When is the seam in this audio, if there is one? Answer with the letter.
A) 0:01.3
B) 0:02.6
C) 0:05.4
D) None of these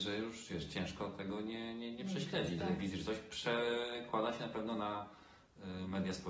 B